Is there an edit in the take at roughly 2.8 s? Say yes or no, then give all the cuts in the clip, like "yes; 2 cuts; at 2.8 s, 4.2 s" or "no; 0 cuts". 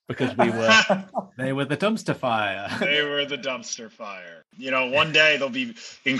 yes; 1 cut; at 2.8 s